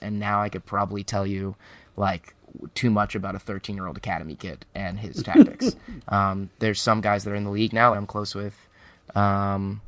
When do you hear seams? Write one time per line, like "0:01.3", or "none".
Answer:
0:06.0
0:07.9